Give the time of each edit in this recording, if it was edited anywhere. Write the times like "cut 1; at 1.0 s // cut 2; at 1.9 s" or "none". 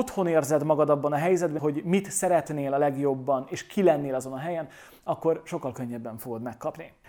cut 1; at 1.6 s